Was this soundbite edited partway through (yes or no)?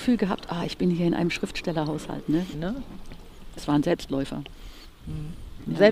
yes